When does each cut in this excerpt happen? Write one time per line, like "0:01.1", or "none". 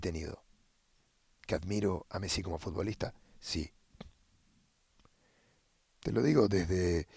0:05.9